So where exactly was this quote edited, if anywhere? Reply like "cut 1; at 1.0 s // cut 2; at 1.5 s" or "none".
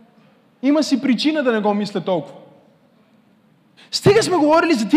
cut 1; at 3.8 s